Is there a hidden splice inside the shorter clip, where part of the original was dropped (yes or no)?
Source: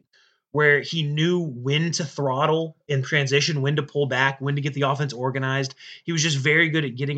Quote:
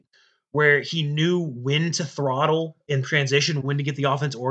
yes